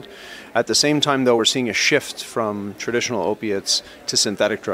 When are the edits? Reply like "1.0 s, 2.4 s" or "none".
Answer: none

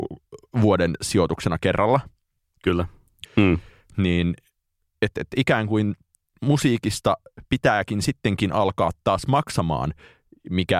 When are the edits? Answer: 3.3 s

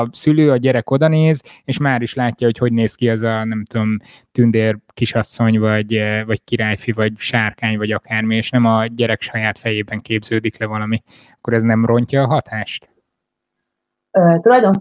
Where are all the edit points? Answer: none

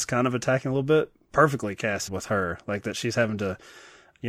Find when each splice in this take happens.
2.1 s

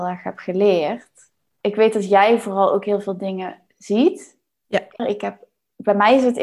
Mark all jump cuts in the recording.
1.6 s, 5.0 s

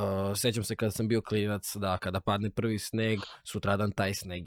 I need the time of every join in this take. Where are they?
none

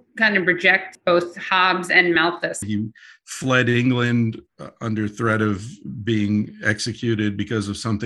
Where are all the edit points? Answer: 2.6 s

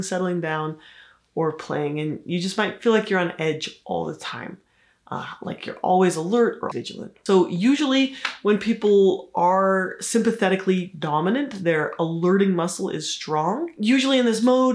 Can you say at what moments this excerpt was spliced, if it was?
6.7 s

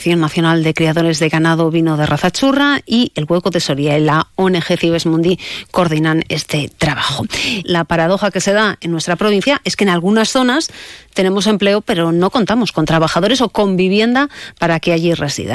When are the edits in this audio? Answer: 7.6 s

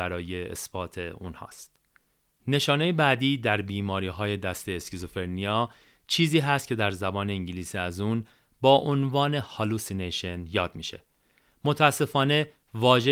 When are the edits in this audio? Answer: none

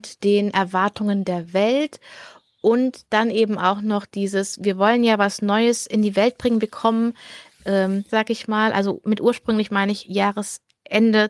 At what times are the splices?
8.1 s

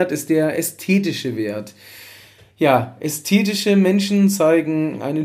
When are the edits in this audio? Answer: none

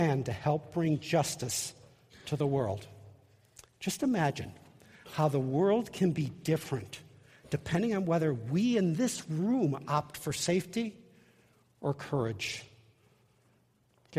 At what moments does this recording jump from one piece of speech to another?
3.8 s

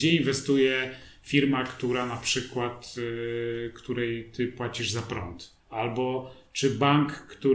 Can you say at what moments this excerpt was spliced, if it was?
5.6 s

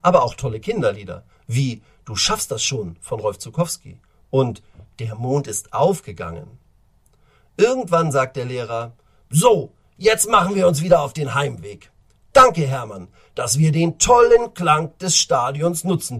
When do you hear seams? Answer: none

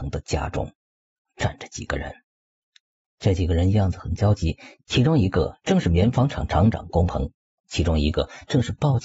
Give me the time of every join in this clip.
1.3 s, 7.6 s

